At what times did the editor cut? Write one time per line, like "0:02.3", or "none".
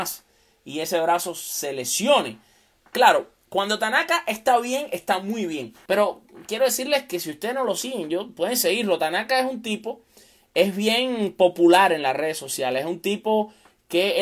0:05.9